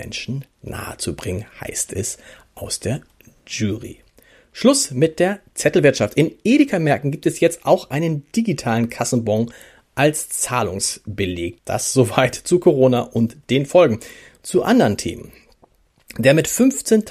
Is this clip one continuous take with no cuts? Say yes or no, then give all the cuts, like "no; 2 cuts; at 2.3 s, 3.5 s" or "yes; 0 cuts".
no; 1 cut; at 11.6 s